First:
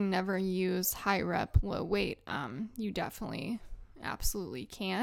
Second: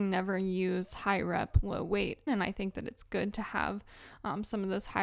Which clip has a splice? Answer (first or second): second